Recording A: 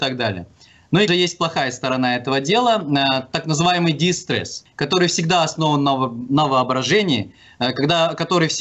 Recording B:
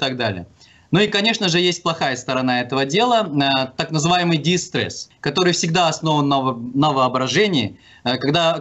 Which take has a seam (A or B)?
A